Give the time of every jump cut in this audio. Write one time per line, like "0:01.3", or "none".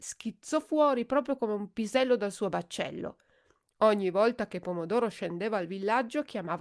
none